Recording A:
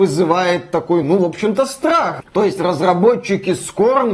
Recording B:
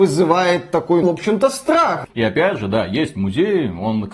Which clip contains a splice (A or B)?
B